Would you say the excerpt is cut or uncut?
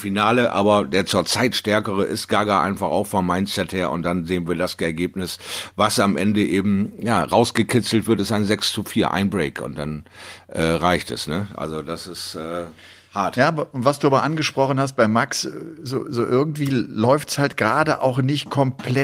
uncut